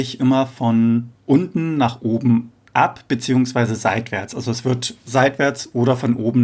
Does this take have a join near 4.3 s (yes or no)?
no